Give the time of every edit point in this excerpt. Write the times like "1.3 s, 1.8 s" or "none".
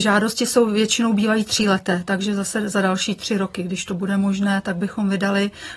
none